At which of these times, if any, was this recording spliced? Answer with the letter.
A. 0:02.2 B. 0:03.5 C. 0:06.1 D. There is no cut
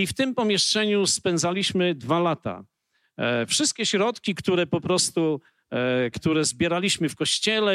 C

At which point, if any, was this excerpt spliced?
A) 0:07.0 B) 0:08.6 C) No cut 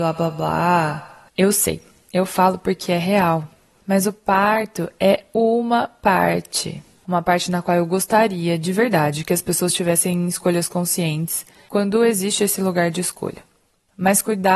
A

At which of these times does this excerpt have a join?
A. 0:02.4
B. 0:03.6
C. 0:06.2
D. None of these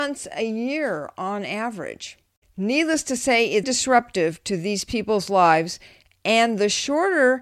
B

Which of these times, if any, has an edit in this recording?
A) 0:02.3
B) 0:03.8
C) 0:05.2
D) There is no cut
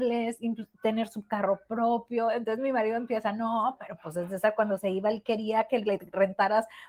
D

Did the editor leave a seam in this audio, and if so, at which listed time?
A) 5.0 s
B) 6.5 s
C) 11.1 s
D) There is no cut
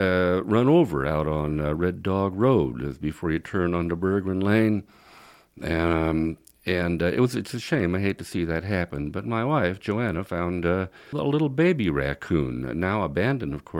C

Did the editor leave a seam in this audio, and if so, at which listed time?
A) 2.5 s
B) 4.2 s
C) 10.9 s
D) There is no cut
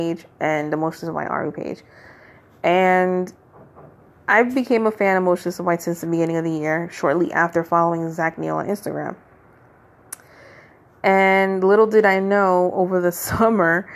D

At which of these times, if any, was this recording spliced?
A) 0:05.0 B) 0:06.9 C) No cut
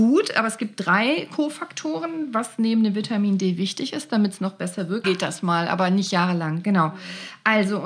A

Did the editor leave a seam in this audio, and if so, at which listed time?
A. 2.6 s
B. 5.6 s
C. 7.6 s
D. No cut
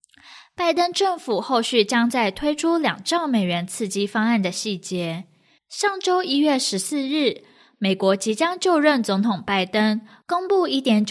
B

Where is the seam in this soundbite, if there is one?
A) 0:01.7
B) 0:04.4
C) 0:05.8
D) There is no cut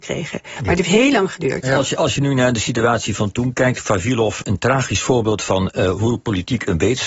B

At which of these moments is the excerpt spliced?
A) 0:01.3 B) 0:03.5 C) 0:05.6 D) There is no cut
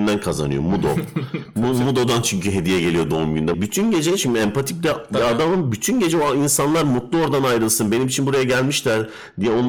B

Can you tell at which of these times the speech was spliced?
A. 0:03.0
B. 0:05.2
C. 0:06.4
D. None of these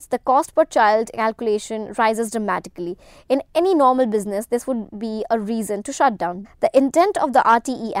C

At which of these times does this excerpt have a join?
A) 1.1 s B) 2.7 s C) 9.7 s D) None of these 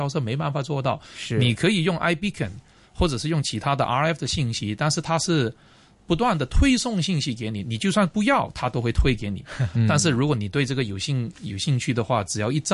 C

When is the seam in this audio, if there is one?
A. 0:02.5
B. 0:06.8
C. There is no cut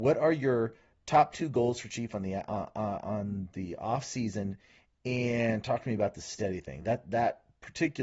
C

